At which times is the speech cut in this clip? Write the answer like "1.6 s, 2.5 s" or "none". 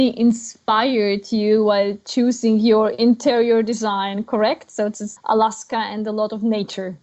5.2 s